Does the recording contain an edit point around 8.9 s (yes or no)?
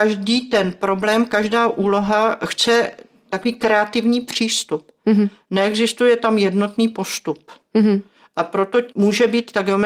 yes